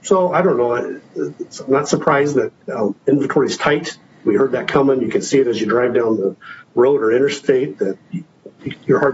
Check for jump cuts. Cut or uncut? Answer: cut